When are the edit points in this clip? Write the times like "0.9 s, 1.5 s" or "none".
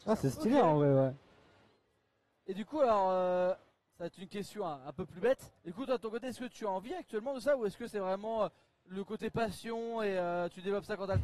5.6 s